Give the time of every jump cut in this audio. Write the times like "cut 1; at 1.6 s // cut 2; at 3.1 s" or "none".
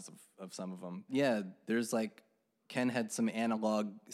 cut 1; at 1.1 s